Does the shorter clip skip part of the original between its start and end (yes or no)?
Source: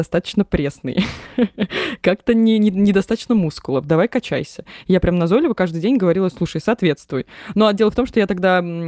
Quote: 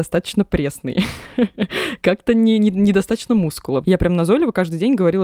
yes